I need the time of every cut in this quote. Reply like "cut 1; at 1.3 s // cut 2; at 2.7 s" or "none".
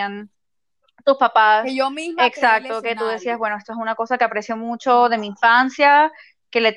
none